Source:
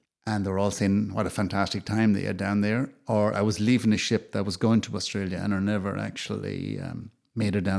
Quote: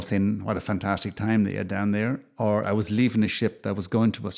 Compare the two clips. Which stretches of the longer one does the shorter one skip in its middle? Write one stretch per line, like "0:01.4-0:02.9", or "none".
none